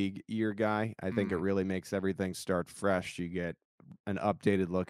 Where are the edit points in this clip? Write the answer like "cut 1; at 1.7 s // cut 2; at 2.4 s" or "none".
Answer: none